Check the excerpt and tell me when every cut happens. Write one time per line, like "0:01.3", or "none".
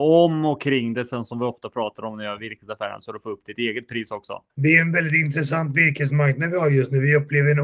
0:04.5